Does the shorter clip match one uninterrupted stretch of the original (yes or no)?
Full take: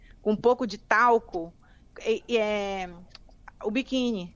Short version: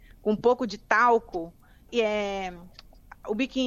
no